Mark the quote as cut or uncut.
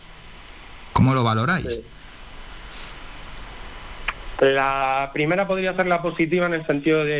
cut